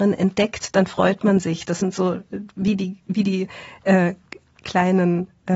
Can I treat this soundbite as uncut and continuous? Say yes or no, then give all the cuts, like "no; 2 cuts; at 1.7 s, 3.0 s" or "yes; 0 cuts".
yes; 0 cuts